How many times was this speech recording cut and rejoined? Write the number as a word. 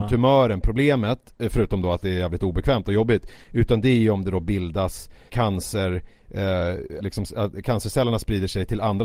two